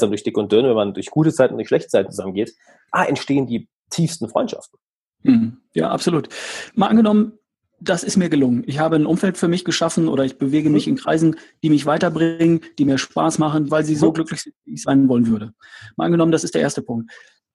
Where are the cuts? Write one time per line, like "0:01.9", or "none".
0:13.7